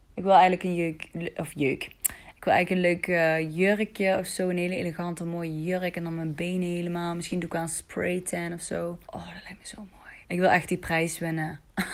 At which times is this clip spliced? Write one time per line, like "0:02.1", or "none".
0:09.0
0:10.2